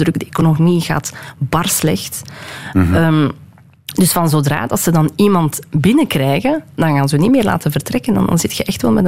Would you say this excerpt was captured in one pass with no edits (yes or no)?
yes